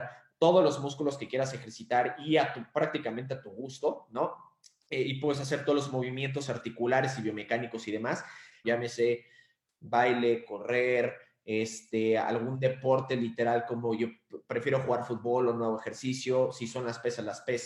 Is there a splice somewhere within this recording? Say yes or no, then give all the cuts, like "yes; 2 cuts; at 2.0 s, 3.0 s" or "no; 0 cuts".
yes; 1 cut; at 8.6 s